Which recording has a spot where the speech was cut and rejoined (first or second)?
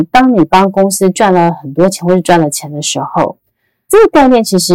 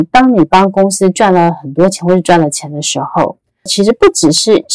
second